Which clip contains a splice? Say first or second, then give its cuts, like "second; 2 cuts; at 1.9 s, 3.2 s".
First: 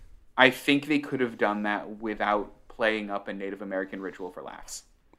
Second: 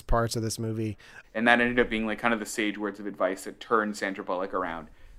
second; 1 cut; at 1.2 s